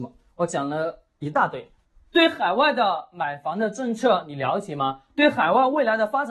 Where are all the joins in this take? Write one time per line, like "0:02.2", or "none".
0:02.0